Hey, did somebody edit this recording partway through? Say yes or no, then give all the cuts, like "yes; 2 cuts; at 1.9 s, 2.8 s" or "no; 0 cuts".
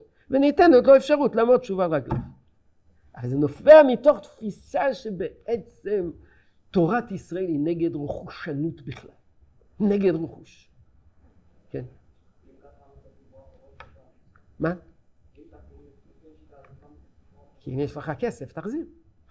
no; 0 cuts